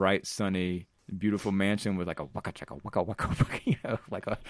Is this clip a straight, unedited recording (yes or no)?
yes